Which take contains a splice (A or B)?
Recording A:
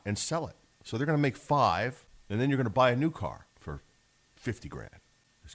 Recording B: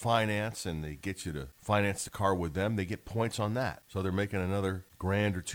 A